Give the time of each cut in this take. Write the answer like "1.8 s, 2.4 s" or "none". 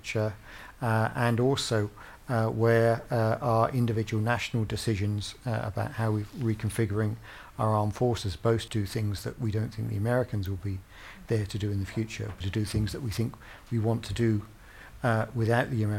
8.7 s, 12.4 s